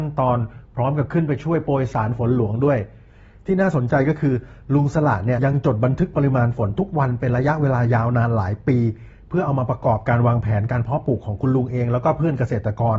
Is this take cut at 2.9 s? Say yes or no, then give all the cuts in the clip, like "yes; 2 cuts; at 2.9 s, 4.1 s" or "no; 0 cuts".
no; 1 cut; at 5.4 s